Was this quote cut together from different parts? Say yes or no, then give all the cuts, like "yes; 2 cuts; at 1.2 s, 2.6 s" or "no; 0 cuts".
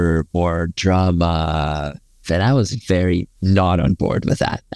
yes; 2 cuts; at 2.2 s, 3.4 s